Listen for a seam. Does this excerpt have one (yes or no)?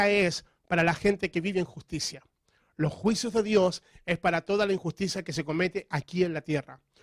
no